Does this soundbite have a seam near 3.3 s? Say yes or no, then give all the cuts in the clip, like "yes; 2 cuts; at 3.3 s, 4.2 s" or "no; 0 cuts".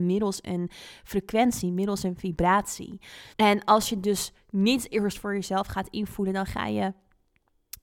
yes; 1 cut; at 3.3 s